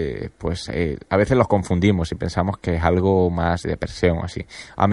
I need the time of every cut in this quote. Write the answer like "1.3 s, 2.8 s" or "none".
3.6 s